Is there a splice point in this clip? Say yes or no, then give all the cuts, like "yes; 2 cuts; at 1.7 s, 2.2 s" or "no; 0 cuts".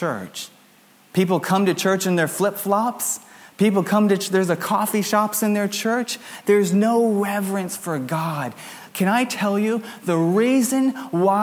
no; 0 cuts